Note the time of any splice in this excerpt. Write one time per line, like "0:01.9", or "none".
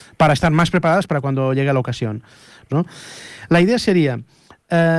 0:02.7